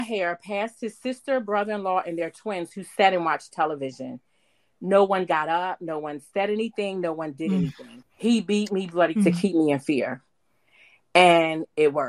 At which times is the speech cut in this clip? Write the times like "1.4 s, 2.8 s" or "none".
8.0 s, 9.2 s